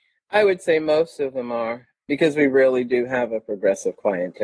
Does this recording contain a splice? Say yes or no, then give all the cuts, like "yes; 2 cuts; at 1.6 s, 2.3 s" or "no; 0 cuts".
no; 0 cuts